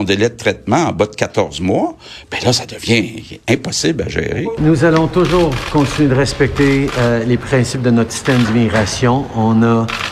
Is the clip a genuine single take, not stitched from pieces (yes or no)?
yes